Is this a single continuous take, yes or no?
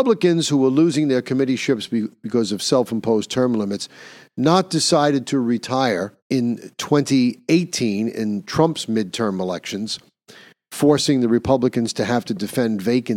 no